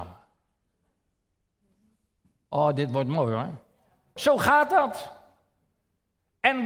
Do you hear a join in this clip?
yes; 1 cut; at 4.2 s

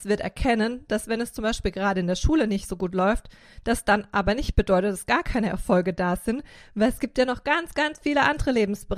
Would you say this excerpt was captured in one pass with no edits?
yes; 0 cuts

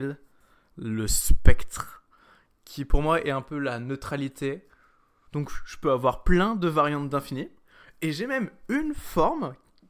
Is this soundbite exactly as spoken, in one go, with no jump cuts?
no; 1 cut; at 5.3 s

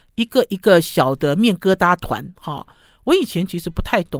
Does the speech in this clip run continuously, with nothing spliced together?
yes; 0 cuts

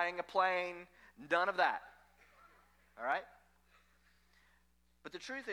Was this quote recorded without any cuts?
yes; 0 cuts

